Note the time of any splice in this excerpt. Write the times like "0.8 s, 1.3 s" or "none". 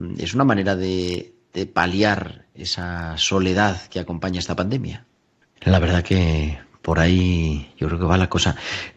5.6 s